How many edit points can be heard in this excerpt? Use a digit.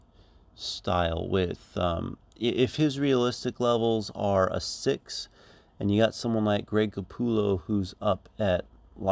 0